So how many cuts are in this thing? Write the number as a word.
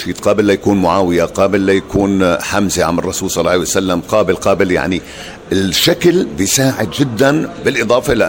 zero